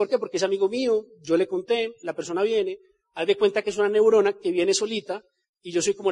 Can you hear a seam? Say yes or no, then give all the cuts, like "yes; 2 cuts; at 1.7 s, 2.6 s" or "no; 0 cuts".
no; 0 cuts